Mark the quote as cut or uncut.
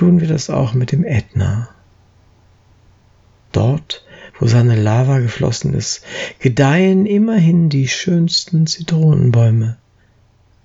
uncut